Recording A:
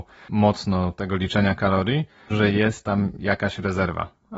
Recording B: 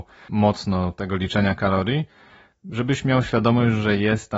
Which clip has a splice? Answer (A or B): A